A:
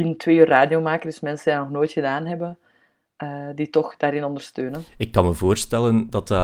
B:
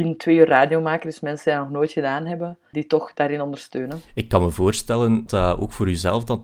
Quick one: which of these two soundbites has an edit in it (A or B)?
B